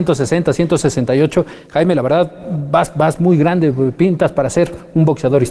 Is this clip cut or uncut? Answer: uncut